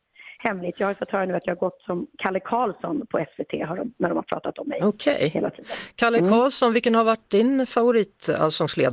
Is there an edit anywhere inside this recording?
no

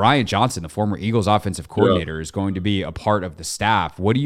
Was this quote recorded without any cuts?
yes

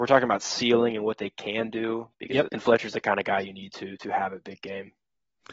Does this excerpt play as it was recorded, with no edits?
no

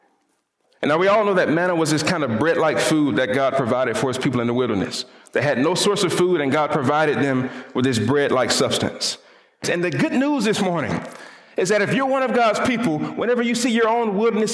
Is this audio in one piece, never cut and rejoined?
no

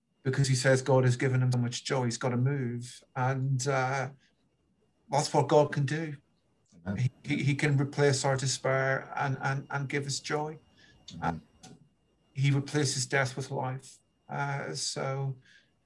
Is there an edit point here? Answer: yes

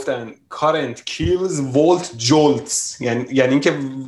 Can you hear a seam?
no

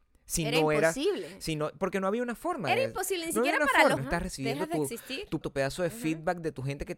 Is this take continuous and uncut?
no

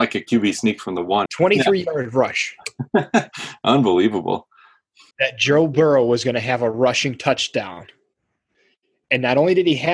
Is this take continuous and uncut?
no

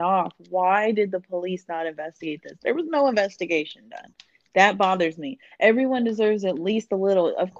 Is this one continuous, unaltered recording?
yes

